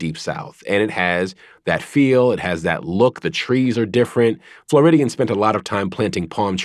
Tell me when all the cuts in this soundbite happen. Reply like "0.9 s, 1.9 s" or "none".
none